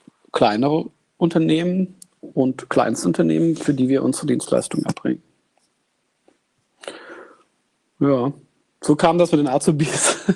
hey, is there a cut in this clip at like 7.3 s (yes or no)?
no